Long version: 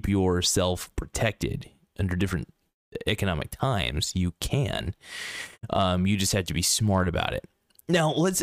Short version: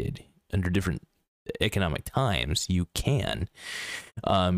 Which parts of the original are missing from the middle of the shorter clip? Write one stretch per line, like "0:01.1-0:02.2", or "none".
none